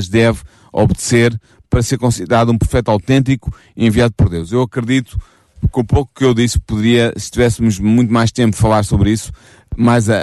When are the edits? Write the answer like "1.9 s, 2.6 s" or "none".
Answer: none